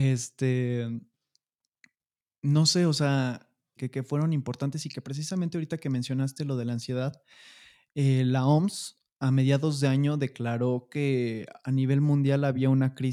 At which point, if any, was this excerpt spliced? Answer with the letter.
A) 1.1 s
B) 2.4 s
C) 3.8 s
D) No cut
C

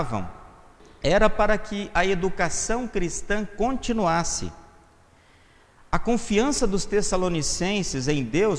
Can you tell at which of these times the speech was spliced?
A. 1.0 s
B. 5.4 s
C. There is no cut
C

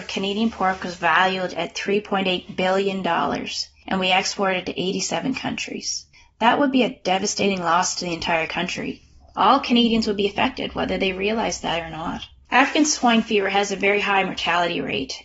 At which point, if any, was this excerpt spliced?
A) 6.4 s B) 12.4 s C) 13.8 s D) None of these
D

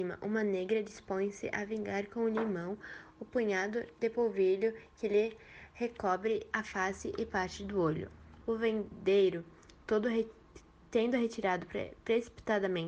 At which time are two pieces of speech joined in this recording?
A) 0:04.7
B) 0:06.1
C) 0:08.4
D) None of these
C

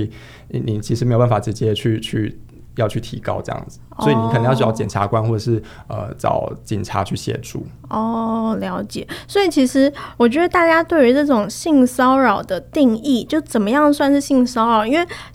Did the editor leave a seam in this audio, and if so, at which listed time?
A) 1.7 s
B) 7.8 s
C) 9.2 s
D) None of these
D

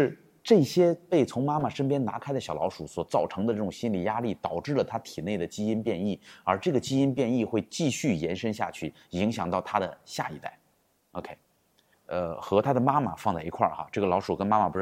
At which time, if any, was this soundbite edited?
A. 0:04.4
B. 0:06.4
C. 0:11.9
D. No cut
C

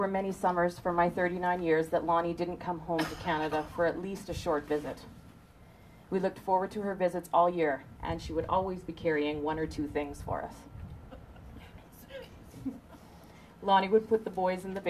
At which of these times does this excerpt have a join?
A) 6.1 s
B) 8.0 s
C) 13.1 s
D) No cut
B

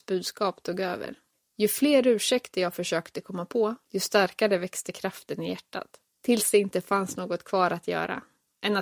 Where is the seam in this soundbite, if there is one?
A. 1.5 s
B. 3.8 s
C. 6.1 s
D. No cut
B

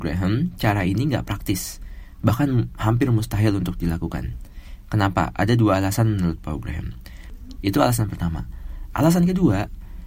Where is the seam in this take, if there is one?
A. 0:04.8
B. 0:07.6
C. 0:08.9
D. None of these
B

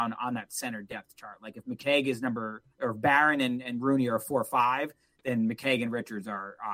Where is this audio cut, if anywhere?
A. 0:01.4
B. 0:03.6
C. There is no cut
C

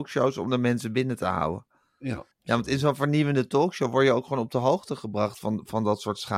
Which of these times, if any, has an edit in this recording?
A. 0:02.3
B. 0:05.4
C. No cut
A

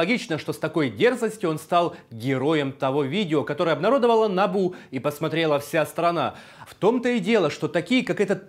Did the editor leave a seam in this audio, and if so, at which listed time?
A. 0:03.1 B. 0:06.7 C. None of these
B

